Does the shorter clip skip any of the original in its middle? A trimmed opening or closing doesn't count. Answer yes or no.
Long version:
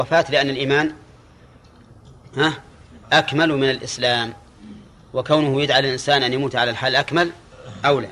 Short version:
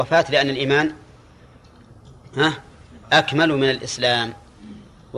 no